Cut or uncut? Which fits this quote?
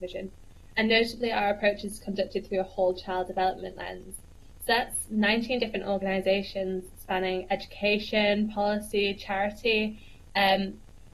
uncut